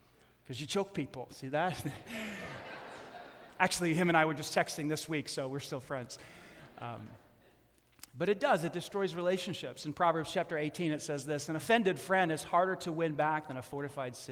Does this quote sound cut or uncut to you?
uncut